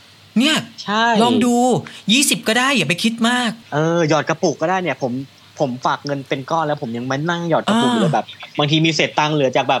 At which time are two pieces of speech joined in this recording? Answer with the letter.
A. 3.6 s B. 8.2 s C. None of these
A